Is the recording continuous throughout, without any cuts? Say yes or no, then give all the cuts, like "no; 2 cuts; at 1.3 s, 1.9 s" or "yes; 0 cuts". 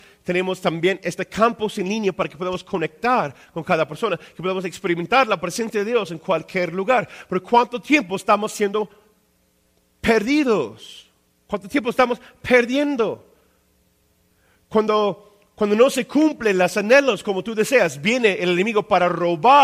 yes; 0 cuts